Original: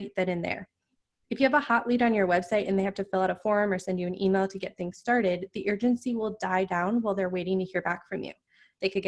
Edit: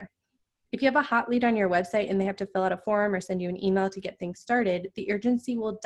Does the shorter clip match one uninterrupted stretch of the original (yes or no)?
yes